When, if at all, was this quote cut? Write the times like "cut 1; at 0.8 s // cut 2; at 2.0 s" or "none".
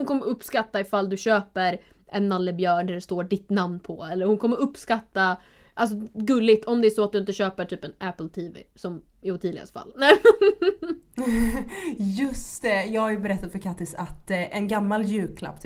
none